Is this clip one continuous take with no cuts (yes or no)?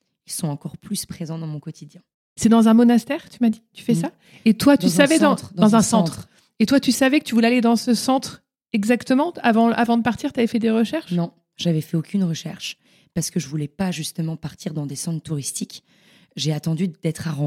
yes